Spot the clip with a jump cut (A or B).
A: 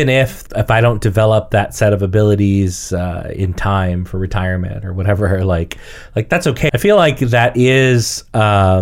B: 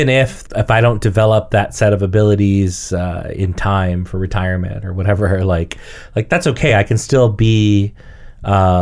A